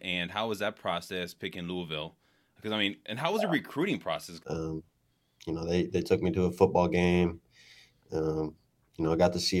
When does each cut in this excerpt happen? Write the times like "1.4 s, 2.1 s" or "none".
4.4 s